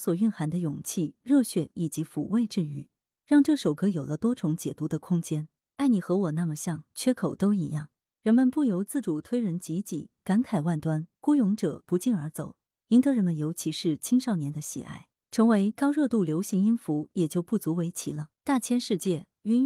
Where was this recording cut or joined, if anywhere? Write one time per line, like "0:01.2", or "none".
0:18.3